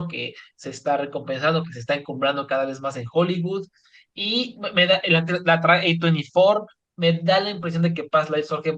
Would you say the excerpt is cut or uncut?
uncut